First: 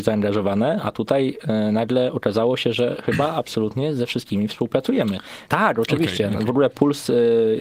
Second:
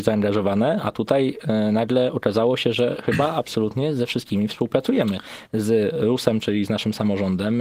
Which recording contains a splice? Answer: first; 1 cut; at 5.5 s

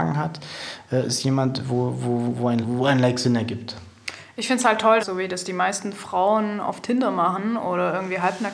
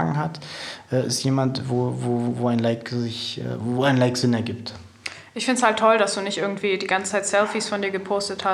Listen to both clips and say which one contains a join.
first; 2 cuts; at 2.6 s, 5.0 s

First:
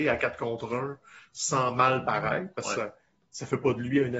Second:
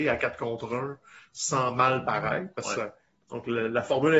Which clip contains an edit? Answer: second; 1 cut; at 3.2 s

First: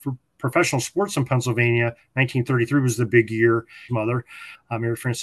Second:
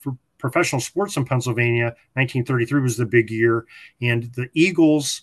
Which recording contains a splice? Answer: first; 1 cut; at 3.9 s

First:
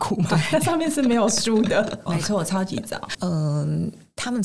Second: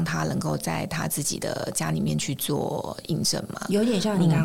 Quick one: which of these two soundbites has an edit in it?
first; 2 cuts; at 2.1 s, 3.1 s

